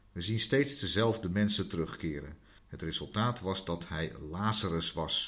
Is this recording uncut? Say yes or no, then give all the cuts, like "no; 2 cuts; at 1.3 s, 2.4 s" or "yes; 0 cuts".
no; 1 cut; at 2.6 s